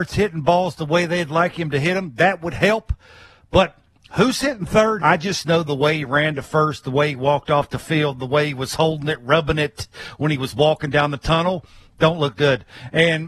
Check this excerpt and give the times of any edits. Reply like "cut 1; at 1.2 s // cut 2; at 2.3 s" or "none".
cut 1; at 5.0 s